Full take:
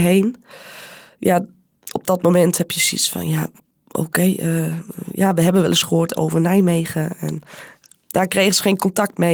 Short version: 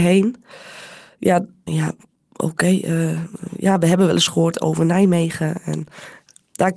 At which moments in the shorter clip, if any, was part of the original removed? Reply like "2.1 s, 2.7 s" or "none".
1.7 s